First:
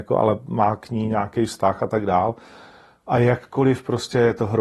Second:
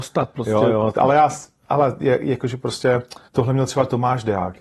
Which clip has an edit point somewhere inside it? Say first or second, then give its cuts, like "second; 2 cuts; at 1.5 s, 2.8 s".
second; 2 cuts; at 0.9 s, 3.3 s